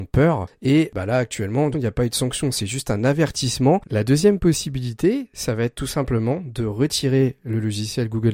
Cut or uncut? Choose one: cut